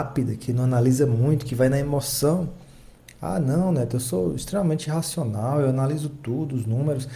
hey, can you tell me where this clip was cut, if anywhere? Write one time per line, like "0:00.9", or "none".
none

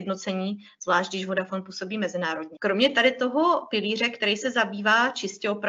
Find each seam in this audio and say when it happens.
0:02.6

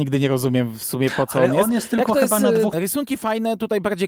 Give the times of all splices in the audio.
0:02.7

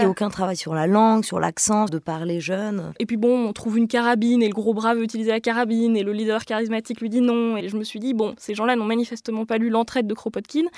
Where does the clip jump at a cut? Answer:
0:01.9
0:07.6

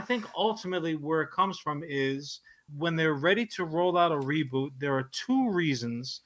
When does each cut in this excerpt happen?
0:02.7

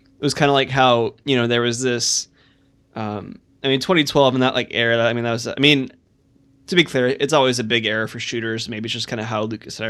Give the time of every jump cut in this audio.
none

